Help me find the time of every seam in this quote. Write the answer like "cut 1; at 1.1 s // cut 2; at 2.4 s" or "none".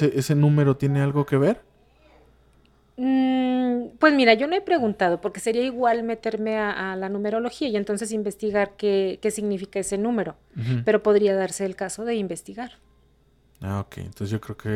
none